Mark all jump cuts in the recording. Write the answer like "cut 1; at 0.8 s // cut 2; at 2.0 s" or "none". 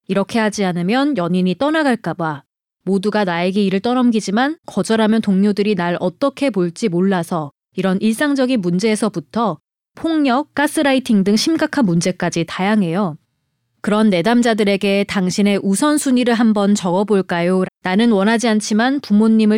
cut 1; at 10.5 s // cut 2; at 17.6 s